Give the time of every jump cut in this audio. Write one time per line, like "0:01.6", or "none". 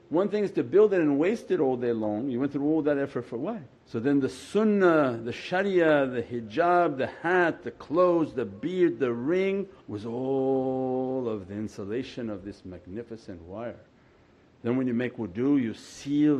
0:03.7
0:09.8